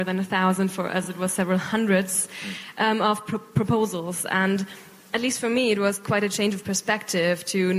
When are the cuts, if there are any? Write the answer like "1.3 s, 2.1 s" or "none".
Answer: none